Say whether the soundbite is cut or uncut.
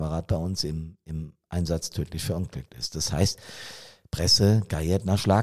uncut